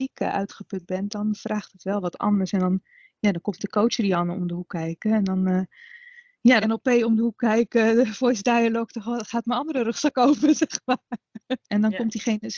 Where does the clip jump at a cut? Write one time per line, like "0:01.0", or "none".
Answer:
0:06.6
0:11.6